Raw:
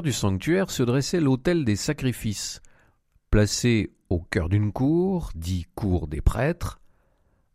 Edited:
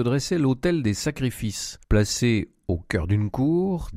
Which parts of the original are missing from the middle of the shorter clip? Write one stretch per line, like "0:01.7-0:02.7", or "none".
0:02.7-0:03.3